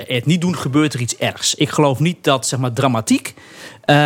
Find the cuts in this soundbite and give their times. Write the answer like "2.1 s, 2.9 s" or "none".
none